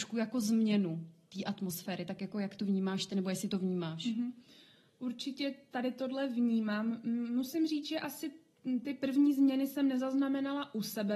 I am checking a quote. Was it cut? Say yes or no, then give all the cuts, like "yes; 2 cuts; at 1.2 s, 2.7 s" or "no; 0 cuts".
no; 0 cuts